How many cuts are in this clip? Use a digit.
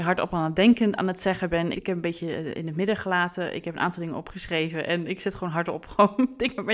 1